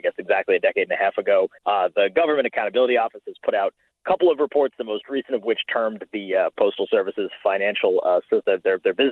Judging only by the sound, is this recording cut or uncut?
cut